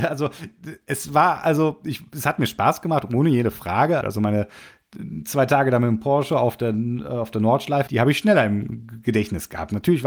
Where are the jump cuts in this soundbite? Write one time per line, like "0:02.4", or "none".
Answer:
0:04.0
0:07.9